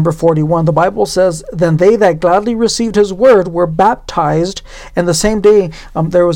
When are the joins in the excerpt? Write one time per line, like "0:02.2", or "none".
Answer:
none